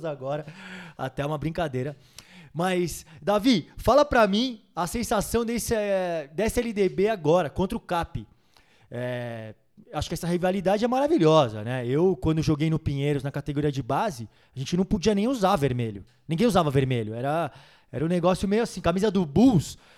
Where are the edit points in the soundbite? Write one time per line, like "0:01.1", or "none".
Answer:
none